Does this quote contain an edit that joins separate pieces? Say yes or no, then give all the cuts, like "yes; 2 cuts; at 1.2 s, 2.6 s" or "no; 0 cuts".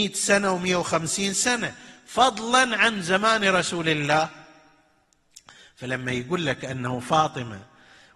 no; 0 cuts